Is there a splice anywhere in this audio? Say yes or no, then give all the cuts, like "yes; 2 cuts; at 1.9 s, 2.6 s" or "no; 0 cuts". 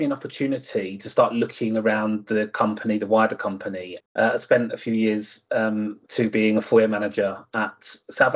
yes; 2 cuts; at 4.0 s, 6.1 s